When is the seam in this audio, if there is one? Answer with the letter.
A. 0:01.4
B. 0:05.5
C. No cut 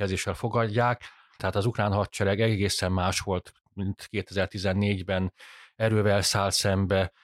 A